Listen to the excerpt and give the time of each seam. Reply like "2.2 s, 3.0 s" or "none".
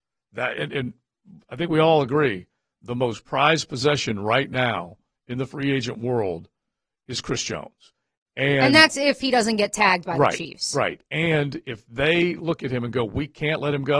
none